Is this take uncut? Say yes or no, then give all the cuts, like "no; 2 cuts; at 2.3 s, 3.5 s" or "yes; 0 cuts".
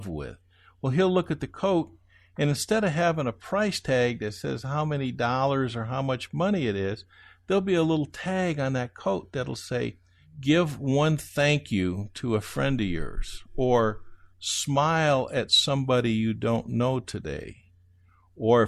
yes; 0 cuts